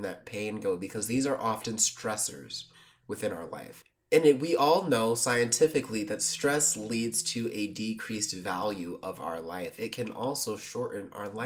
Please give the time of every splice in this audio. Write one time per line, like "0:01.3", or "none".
none